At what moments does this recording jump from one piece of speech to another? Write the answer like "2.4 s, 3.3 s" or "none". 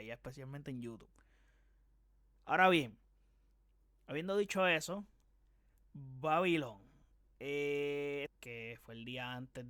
8.3 s

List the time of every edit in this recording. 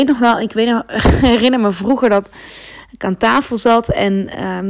none

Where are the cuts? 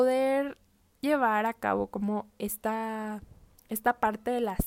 none

